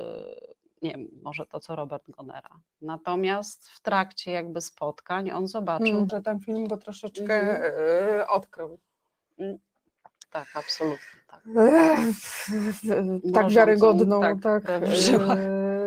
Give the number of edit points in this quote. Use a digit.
2